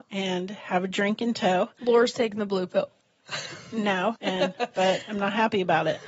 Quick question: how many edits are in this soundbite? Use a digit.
1